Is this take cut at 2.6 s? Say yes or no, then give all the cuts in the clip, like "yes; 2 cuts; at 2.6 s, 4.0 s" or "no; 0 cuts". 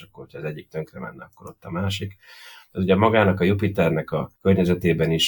no; 1 cut; at 4.4 s